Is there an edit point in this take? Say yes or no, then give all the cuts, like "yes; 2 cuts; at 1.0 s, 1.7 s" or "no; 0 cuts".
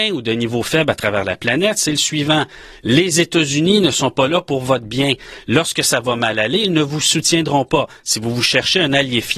no; 0 cuts